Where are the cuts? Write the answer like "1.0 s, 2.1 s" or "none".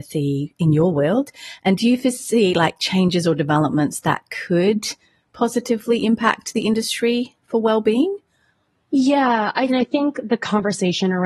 9.7 s